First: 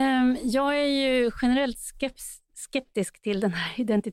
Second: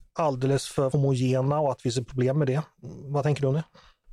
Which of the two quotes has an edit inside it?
second; 1 cut; at 0.9 s

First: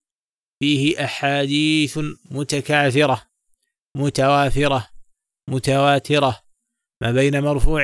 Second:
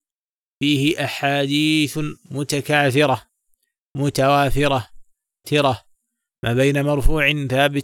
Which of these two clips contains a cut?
second; 1 cut; at 5.4 s

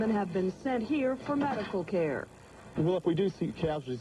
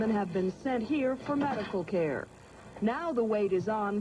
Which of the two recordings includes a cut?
first; 1 cut; at 2.8 s

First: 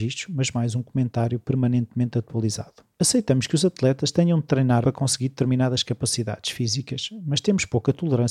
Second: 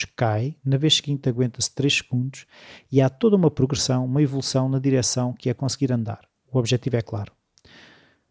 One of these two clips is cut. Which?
first; 2 cuts; at 3.0 s, 4.8 s

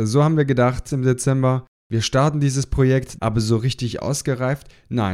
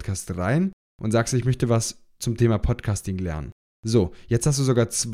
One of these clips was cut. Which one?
first; 2 cuts; at 0.9 s, 3.2 s

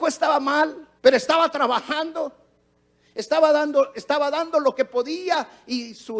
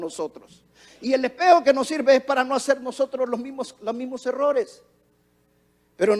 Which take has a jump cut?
first; 1 cut; at 1.0 s

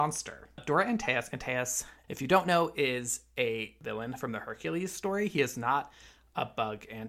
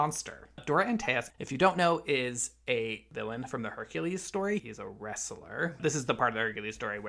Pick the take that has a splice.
second; 3 cuts; at 1.3 s, 4.6 s, 5.8 s

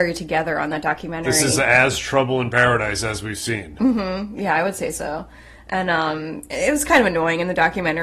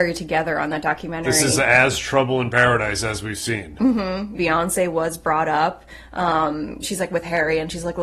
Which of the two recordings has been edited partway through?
second; 2 cuts; at 4.3 s, 6.8 s

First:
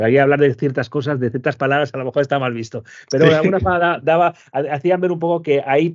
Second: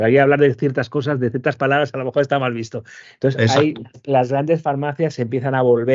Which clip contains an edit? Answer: second; 1 cut; at 3.0 s

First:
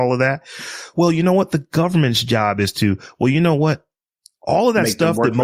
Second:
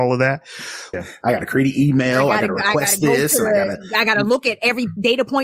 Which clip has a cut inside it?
second; 1 cut; at 0.9 s

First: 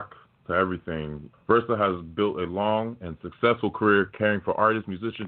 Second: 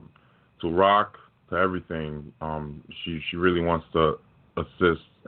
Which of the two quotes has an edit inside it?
first; 1 cut; at 1.3 s

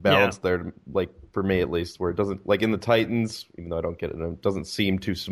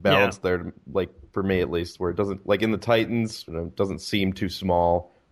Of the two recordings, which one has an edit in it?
second; 1 cut; at 3.5 s

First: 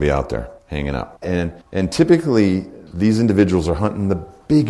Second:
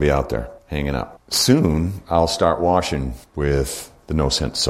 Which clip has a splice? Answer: first; 1 cut; at 1.2 s

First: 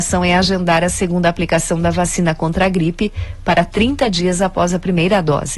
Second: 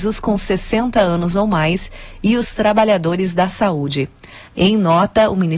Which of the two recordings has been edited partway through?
second; 1 cut; at 4.5 s

